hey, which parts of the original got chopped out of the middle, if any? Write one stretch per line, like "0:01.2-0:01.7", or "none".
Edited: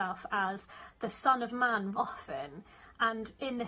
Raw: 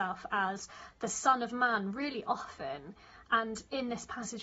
0:01.9-0:02.2